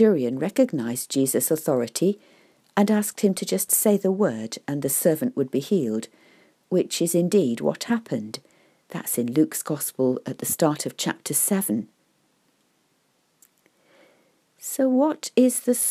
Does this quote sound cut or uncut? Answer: uncut